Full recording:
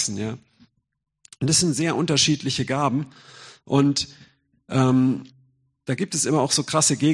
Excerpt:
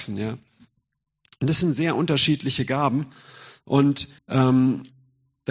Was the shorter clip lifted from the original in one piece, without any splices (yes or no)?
no